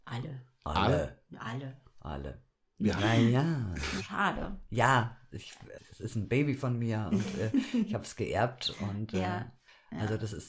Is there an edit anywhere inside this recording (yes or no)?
yes